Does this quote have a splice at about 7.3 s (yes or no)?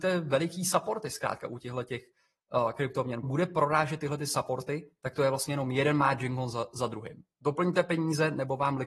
no